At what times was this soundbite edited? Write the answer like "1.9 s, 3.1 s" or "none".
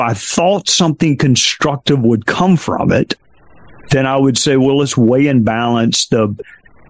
none